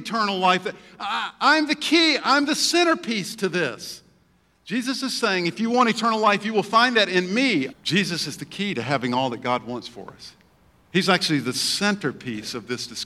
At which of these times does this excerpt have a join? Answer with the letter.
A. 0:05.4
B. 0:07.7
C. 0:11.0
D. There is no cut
B